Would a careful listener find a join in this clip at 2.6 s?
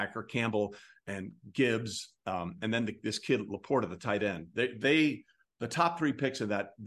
no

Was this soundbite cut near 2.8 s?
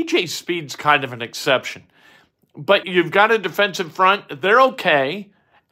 yes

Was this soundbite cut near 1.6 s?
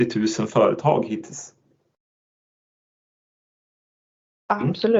no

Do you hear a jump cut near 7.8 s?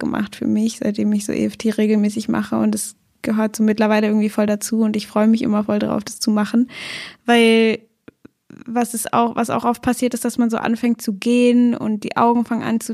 no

